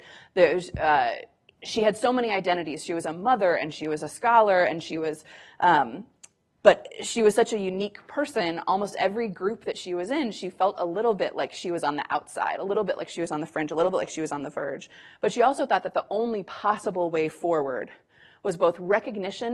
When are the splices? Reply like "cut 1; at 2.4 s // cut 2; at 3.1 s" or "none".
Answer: cut 1; at 6.5 s